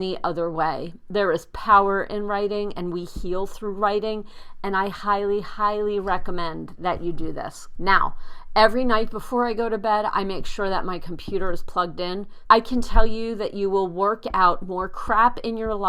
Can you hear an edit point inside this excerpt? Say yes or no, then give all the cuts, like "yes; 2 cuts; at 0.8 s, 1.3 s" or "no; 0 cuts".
yes; 2 cuts; at 7.8 s, 12.5 s